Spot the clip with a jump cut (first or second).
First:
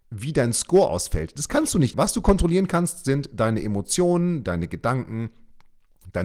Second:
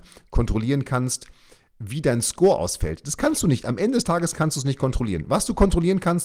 first